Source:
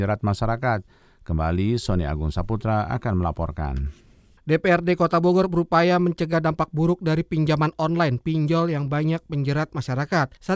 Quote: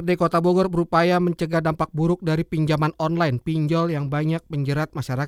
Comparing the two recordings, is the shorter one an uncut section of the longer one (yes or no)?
yes